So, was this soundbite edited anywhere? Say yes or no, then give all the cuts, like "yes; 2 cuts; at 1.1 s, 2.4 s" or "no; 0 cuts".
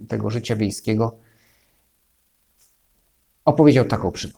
no; 0 cuts